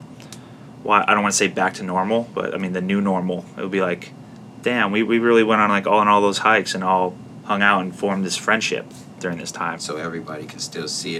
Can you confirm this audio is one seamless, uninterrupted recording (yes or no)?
no